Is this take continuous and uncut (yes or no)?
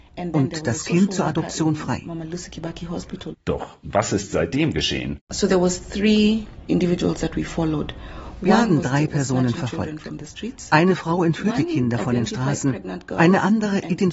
no